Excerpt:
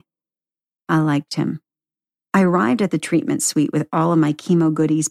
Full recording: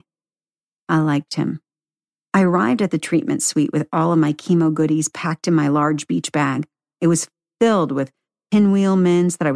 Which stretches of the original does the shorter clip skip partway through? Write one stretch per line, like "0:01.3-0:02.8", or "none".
none